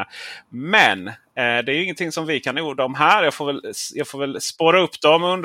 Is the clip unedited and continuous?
yes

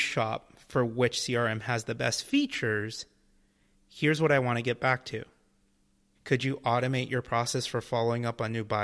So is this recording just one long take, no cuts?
no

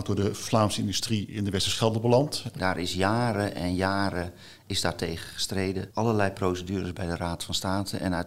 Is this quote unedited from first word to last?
no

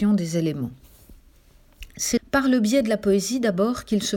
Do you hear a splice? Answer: yes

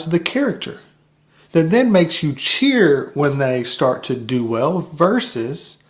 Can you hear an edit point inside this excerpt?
no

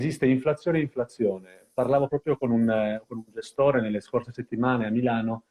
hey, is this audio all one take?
yes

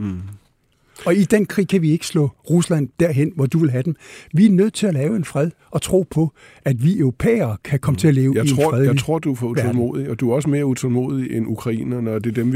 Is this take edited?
no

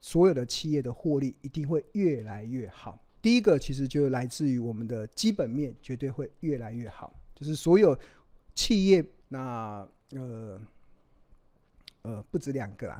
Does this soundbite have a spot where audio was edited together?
yes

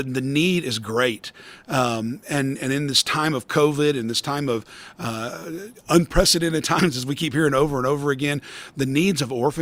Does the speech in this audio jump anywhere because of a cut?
no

